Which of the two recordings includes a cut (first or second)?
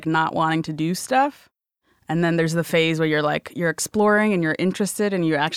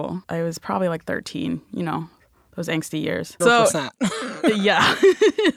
second